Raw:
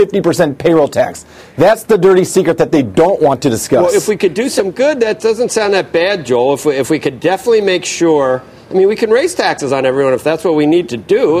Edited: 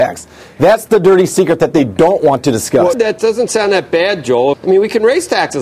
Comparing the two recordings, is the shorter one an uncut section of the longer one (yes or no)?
no